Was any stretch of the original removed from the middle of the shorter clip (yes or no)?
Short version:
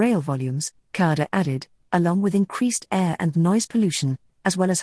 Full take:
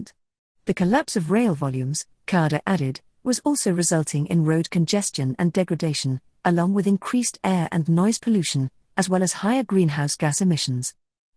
yes